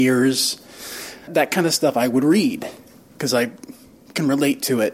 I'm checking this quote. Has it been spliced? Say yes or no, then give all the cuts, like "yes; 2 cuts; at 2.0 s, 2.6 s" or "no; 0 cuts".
yes; 1 cut; at 1.3 s